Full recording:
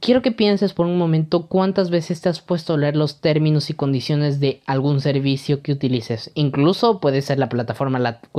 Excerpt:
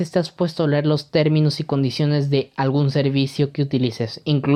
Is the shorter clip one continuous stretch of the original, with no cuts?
yes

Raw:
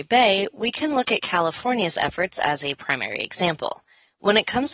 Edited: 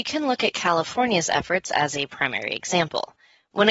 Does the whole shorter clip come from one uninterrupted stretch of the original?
yes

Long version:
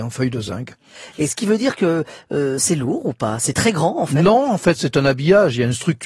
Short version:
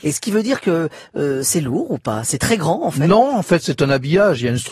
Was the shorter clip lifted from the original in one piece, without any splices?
yes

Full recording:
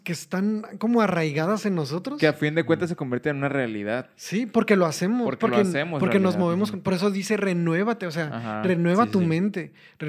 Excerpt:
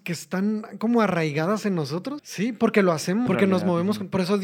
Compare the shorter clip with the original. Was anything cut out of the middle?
yes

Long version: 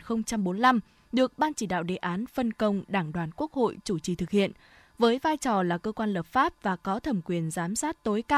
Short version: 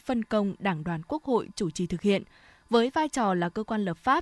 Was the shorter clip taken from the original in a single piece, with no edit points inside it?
yes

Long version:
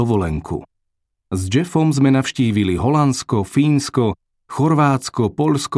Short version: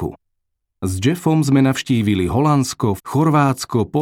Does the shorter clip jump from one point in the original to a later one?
yes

